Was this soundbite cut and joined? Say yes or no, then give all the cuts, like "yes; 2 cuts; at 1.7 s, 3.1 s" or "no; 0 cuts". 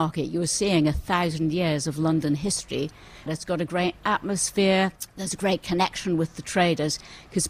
yes; 1 cut; at 3.3 s